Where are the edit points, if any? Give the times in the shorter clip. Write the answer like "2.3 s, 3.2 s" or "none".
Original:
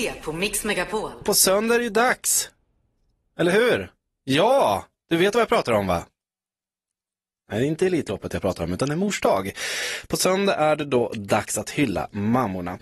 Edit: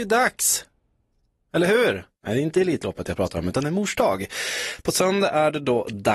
2.1 s